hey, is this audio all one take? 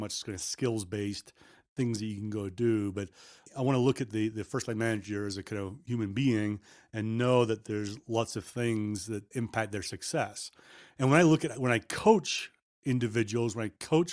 no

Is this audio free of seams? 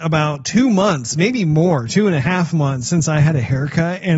yes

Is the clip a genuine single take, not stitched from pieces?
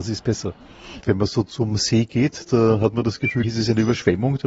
no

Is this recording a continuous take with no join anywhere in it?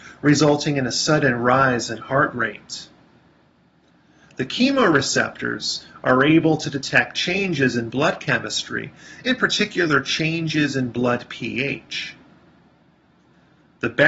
yes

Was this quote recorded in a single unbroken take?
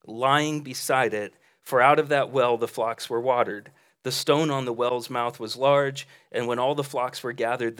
yes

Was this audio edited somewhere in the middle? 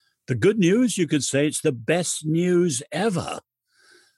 no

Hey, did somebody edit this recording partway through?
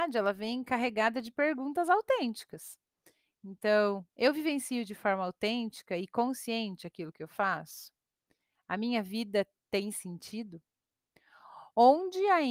no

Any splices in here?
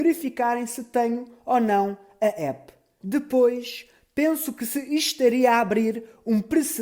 yes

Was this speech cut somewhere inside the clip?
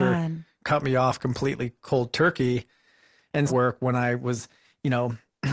yes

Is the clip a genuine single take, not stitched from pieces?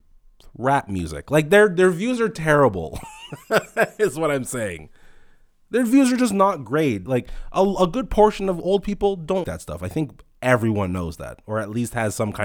no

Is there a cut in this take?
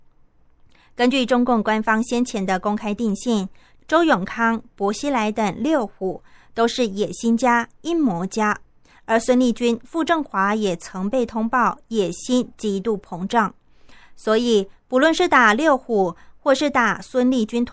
no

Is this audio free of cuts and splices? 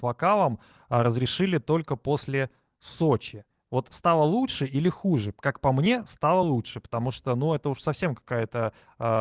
yes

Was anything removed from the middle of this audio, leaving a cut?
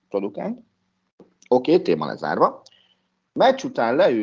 no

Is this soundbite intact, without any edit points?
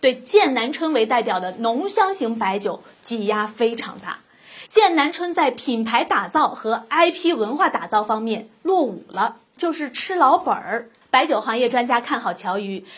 no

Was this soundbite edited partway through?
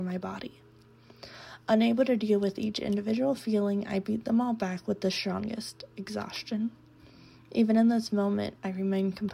no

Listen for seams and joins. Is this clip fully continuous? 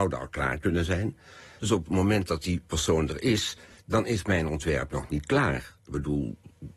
no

